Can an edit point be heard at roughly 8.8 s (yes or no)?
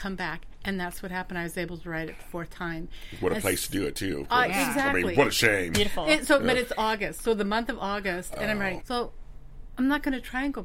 yes